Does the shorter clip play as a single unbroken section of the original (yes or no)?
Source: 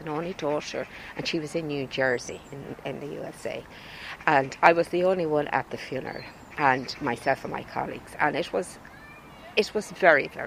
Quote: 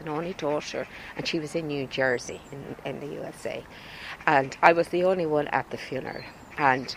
yes